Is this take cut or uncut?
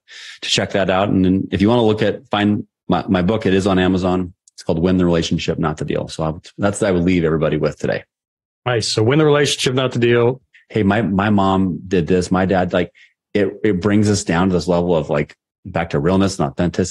cut